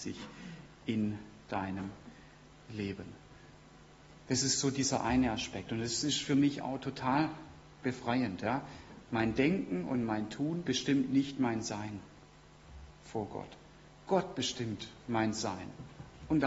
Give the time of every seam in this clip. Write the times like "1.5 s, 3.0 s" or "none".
none